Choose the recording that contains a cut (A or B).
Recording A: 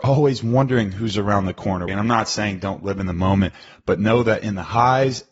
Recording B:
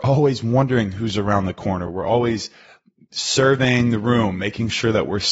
A